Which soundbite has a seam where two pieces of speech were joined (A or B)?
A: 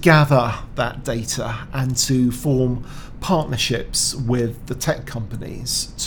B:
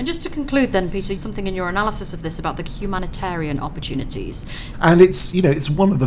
B